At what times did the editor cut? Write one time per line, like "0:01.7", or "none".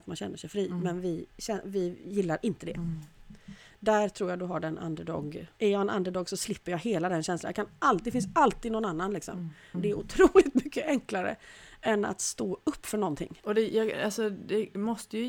0:05.6
0:09.7
0:13.4